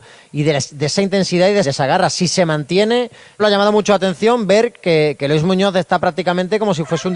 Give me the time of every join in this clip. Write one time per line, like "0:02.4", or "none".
0:01.6
0:03.4

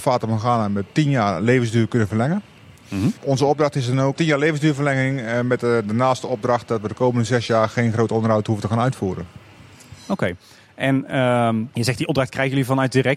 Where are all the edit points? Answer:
none

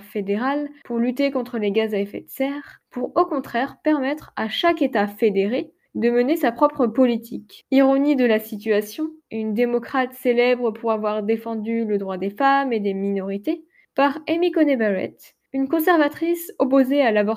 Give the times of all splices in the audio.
0:07.6
0:09.2

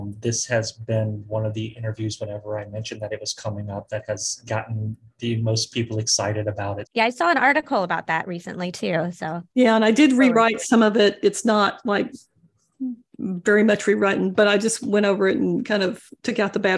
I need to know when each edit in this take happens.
0:06.9
0:09.5

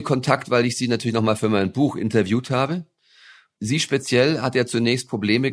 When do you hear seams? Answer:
none

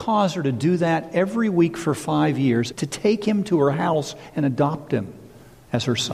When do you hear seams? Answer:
0:02.7

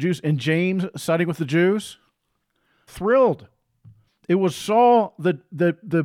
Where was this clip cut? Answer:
0:02.9
0:04.1

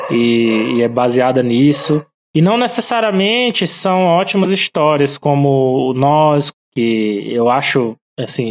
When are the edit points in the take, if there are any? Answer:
0:02.2
0:06.5

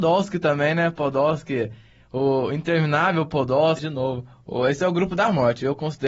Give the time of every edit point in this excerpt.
0:03.8

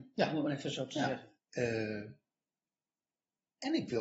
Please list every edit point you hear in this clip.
0:01.4

